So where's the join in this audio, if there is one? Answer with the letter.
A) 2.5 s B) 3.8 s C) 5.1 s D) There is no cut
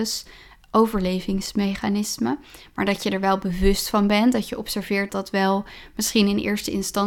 C